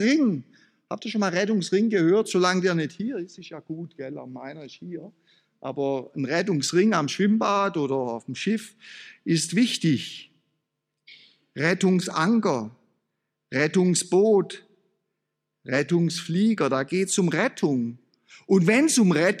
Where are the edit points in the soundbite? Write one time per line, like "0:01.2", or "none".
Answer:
none